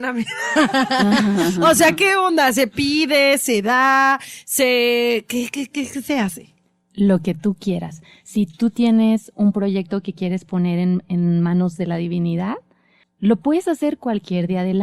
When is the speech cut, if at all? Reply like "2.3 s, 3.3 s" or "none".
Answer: none